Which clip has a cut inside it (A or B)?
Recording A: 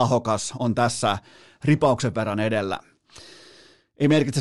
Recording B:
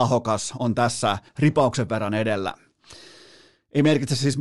B